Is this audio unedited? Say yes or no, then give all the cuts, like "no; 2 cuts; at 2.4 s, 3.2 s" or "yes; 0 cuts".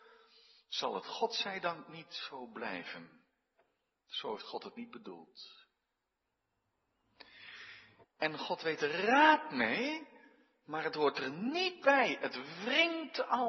no; 1 cut; at 8.0 s